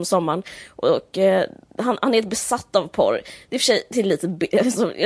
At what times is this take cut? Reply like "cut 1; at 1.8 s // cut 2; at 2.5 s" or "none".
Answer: none